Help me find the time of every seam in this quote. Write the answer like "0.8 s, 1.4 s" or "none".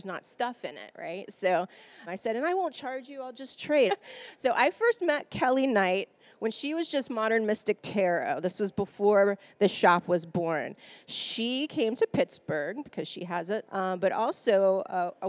2.1 s, 3.9 s, 13.7 s